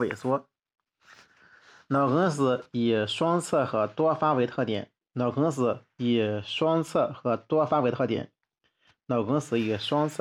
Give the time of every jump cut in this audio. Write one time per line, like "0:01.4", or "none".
none